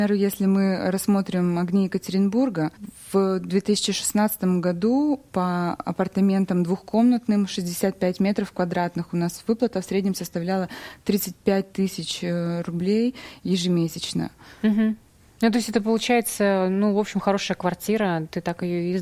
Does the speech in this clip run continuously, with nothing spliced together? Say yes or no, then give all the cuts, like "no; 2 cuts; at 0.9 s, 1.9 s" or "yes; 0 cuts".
yes; 0 cuts